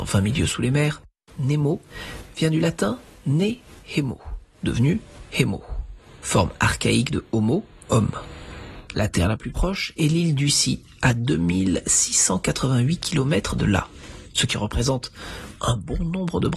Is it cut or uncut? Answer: cut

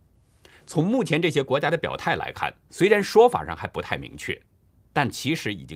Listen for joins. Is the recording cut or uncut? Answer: uncut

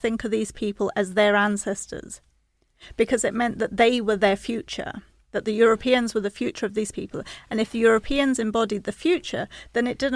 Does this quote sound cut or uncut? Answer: uncut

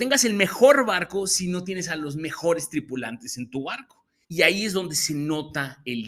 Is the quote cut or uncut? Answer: cut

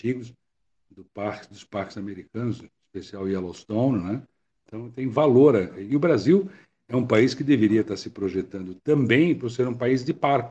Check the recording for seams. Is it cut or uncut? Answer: cut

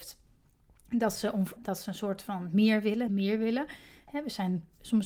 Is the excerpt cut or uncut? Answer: cut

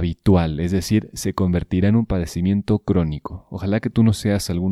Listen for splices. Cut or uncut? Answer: uncut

